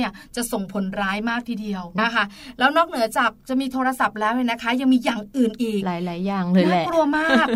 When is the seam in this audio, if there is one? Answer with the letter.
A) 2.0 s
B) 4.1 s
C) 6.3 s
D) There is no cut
A